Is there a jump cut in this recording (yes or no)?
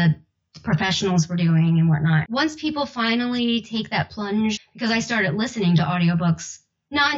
yes